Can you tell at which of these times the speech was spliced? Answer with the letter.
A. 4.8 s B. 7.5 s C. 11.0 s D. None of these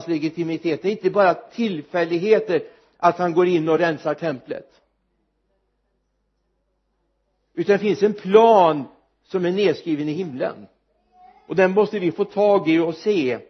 D